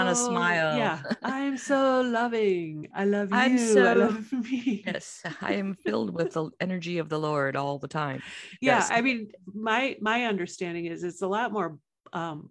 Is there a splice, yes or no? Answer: no